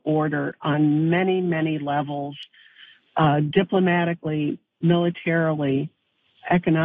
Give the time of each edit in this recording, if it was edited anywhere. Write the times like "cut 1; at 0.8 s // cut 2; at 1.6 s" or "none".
none